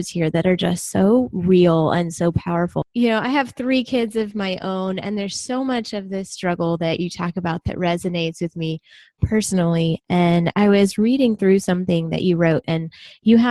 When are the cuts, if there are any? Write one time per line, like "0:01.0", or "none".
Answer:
0:02.8